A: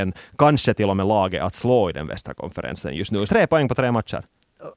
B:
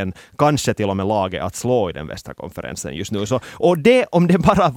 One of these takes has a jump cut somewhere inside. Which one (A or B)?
A